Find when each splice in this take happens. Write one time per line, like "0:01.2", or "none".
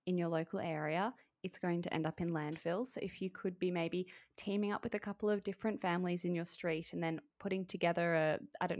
none